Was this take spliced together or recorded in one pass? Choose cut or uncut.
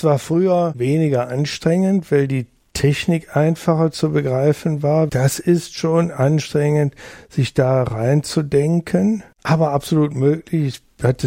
cut